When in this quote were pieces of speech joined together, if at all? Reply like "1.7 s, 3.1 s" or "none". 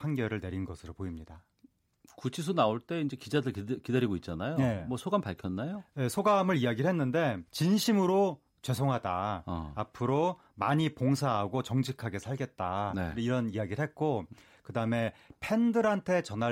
7.5 s